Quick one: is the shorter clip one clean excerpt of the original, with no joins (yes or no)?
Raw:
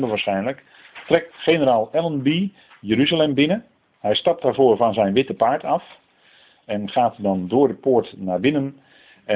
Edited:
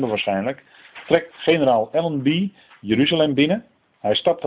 yes